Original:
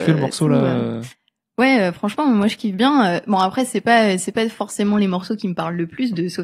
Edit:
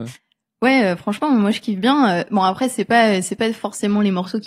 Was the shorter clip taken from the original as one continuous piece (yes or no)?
yes